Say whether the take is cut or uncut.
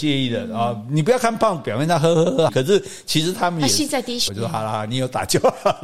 cut